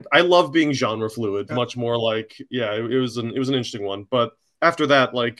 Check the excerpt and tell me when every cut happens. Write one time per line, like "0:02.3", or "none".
0:01.5